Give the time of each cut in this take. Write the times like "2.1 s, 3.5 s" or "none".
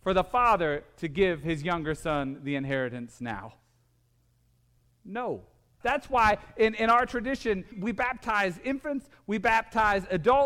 5.8 s, 7.7 s